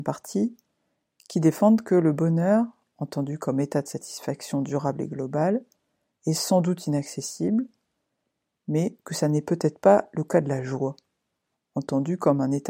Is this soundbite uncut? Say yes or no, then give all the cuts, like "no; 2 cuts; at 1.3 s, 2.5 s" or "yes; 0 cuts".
yes; 0 cuts